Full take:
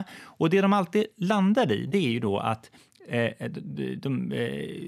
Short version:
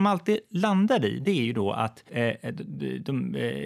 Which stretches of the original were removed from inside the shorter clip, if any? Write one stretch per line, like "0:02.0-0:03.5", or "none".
0:02.7-0:03.0